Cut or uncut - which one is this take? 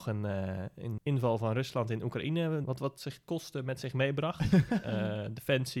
cut